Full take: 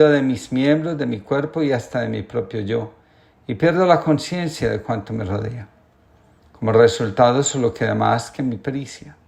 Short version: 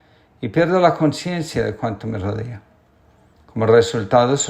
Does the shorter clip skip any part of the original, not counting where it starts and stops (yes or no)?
no